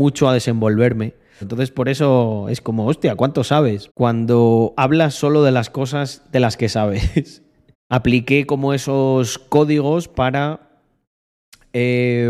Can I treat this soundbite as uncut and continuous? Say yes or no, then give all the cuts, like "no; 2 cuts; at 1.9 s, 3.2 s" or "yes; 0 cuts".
no; 3 cuts; at 1.4 s, 3.9 s, 7.7 s